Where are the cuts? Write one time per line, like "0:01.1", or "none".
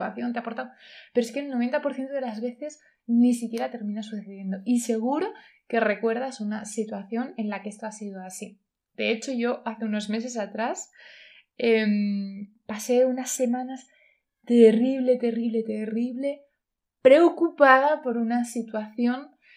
none

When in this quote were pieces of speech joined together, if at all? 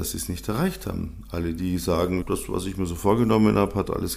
0:02.2

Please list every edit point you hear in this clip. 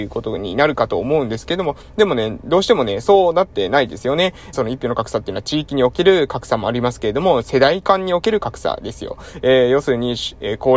0:04.5

